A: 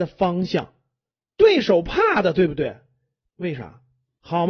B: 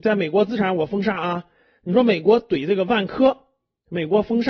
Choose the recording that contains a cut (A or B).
A